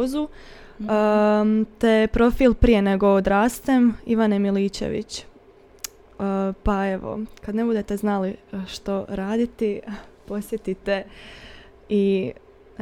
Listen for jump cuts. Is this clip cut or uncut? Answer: uncut